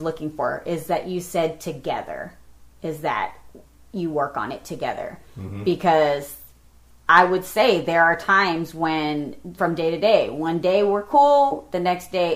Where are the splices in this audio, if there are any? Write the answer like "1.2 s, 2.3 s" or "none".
9.6 s